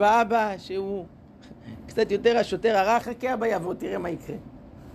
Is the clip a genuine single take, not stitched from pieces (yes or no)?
no